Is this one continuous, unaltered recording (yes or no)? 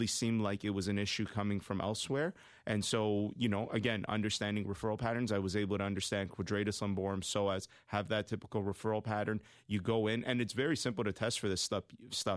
yes